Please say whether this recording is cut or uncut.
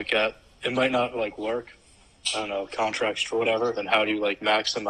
cut